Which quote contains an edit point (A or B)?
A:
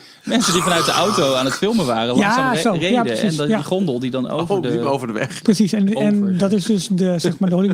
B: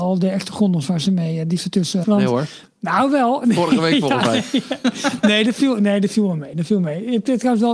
B